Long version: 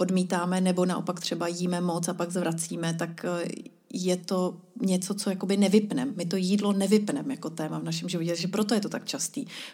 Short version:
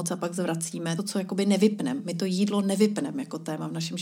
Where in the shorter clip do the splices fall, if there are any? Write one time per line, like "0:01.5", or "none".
0:01.0